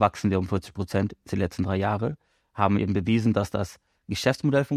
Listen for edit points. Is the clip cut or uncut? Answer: uncut